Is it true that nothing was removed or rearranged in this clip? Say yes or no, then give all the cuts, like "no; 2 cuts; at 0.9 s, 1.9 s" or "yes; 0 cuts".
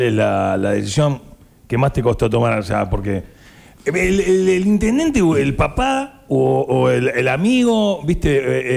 yes; 0 cuts